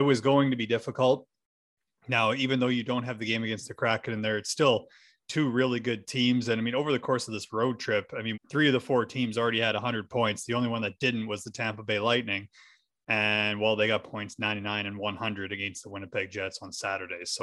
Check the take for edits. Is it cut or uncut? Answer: cut